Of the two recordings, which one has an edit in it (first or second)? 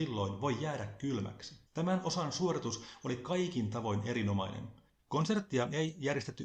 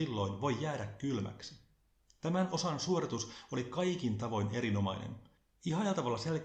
first